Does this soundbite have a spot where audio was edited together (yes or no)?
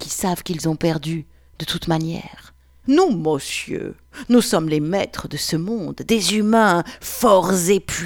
yes